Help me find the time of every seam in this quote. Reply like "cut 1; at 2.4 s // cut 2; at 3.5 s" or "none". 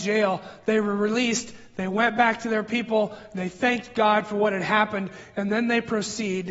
none